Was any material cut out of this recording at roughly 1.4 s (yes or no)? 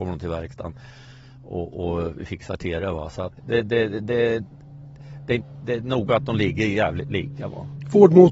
no